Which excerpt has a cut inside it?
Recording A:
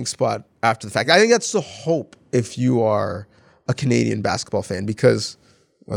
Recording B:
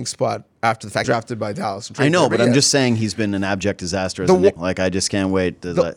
B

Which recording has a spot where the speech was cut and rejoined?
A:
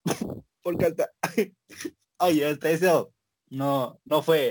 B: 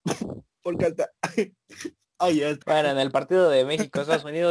B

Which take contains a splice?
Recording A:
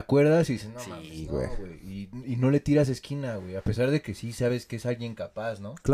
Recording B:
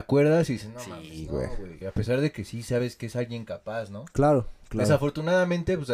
B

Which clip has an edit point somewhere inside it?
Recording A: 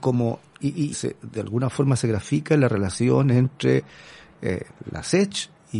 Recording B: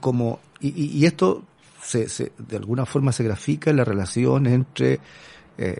A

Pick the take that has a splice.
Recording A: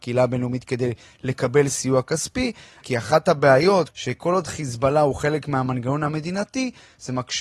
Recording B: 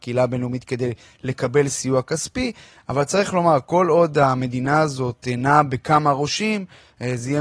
A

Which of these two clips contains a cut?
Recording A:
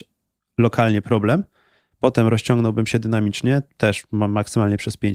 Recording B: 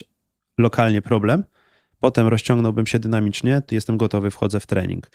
B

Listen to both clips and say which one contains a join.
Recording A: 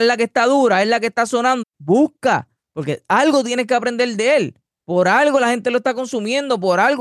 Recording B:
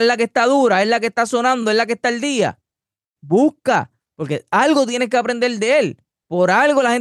A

